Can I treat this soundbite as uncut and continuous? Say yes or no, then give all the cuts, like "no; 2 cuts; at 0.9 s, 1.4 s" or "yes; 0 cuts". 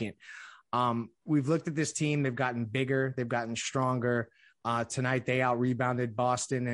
no; 1 cut; at 1.3 s